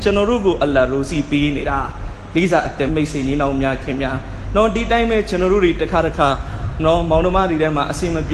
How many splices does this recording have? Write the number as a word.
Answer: one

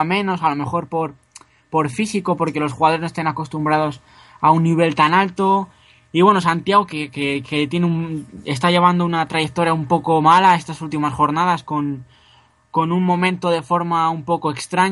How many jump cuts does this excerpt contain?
zero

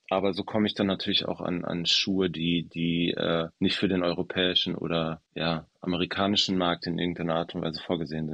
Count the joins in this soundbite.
two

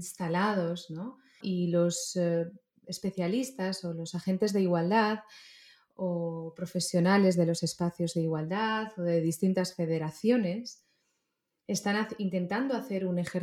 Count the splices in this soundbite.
one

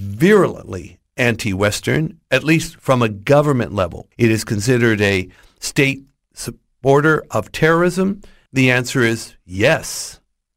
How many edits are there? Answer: two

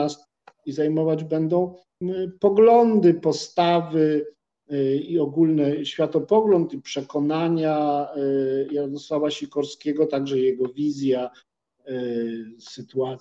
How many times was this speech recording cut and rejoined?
one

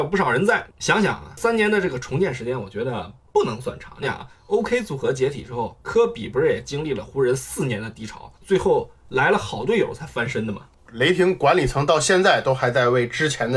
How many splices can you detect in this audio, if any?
one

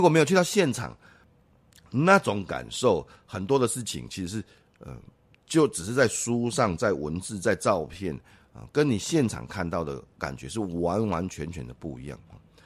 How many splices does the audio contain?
zero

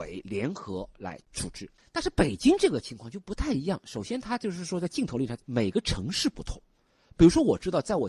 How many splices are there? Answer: zero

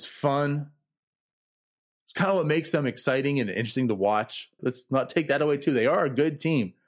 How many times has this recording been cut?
one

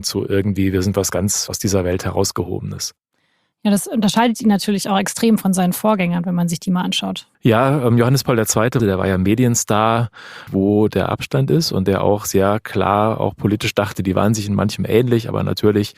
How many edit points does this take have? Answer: three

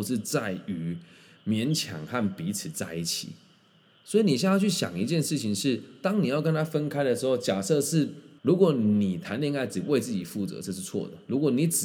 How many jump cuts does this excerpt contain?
one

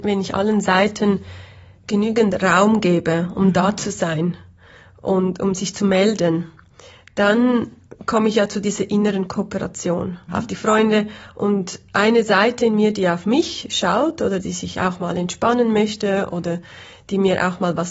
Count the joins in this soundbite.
two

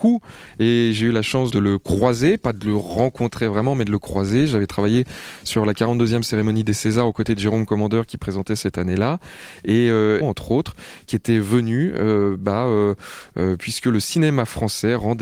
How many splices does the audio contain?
one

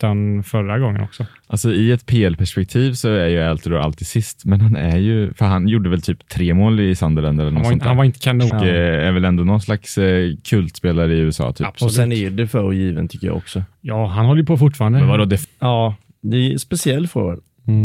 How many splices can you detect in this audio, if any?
two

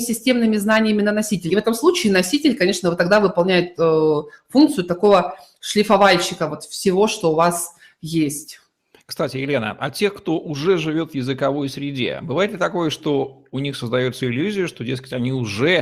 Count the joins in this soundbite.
one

